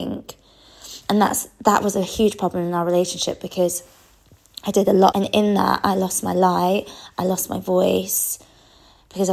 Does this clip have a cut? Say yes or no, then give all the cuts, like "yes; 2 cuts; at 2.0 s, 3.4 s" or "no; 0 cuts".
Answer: yes; 1 cut; at 5.1 s